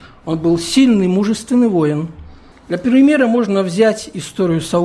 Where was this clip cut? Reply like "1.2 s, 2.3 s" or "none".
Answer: 2.5 s